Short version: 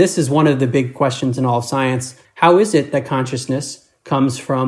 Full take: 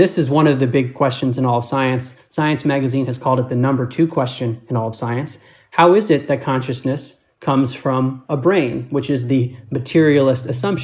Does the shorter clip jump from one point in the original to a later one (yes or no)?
yes